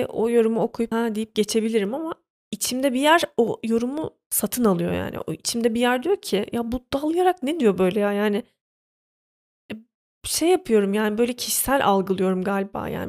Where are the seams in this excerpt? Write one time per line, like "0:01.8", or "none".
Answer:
0:00.9